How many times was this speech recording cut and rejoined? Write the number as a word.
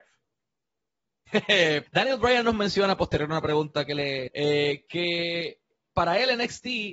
two